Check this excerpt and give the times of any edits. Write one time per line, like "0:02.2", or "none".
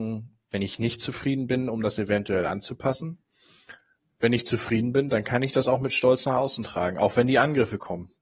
none

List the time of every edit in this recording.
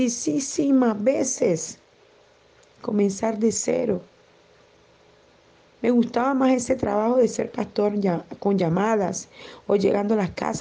0:05.8

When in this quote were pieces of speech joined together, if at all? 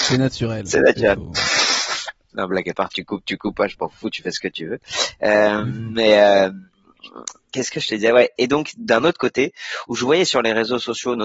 0:02.3

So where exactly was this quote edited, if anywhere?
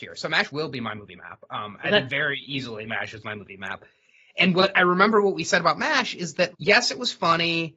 0:06.5

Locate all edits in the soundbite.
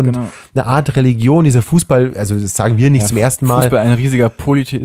none

